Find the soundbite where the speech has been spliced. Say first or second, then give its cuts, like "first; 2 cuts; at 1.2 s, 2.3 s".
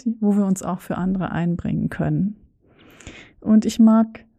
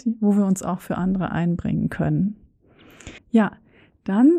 second; 1 cut; at 3.2 s